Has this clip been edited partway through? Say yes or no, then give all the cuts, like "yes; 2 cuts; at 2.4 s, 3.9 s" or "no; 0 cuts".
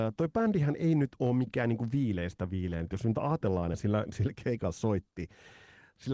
yes; 1 cut; at 3.7 s